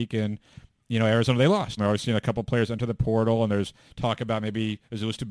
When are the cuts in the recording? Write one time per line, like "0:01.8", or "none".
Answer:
0:01.8